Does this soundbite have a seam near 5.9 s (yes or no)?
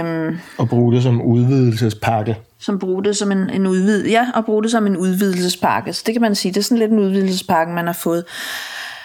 no